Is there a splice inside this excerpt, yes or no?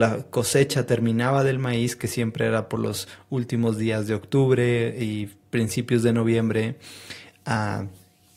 no